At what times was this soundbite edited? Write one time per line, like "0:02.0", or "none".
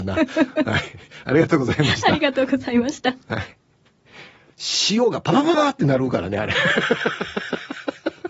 0:05.5